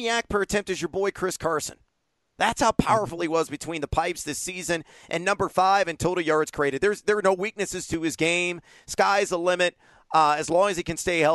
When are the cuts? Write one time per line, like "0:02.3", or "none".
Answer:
none